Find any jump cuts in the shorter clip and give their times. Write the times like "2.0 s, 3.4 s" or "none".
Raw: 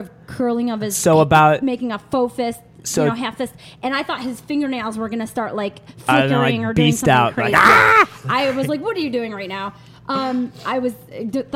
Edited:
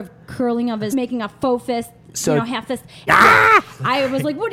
0.9 s, 3.1 s

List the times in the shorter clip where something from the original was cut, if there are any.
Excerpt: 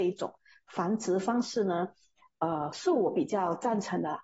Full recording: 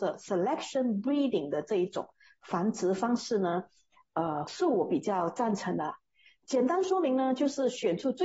none

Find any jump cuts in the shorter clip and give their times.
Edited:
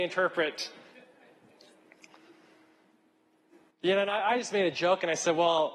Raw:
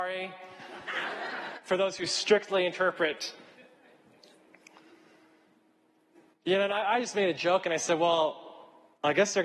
none

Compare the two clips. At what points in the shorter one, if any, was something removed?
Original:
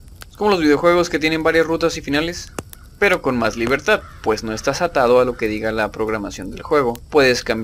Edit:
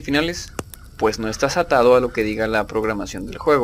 1.0 s

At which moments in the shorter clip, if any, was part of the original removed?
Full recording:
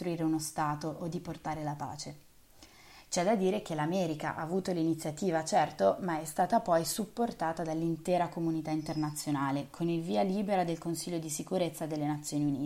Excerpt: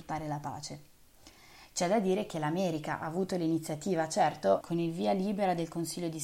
4.6 s

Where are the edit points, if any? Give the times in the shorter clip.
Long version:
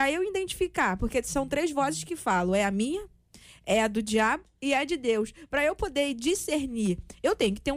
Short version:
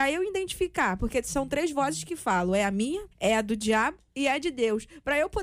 3.1 s

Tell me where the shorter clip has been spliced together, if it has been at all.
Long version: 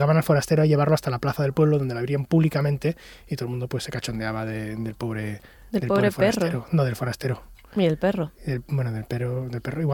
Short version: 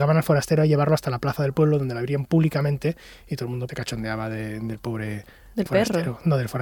3.7 s, 5.7 s

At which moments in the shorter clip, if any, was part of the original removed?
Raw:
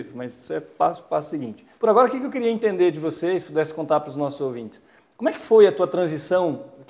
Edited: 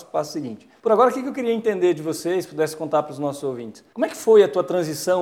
3.9 s

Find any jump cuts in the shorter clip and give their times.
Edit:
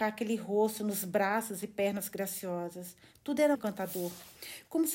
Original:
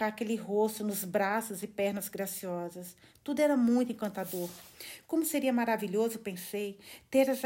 3.5 s

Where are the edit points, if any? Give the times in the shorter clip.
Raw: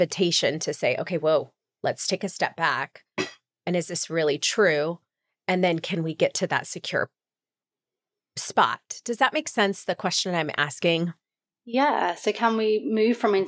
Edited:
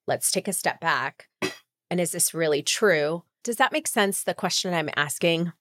3.4 s

